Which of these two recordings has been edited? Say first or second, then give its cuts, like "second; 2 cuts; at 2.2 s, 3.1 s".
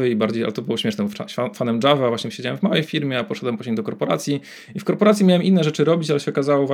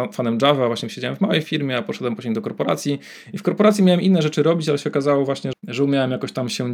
second; 1 cut; at 5.5 s